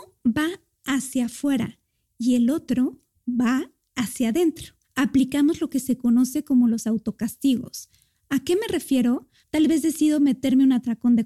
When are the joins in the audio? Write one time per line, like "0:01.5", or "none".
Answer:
0:04.8
0:09.4